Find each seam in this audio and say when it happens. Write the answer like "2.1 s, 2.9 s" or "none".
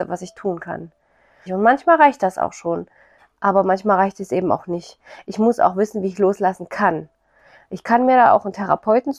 1.5 s